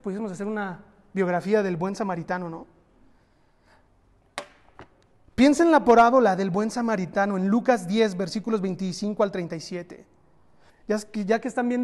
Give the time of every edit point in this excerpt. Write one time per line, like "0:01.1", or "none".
0:10.7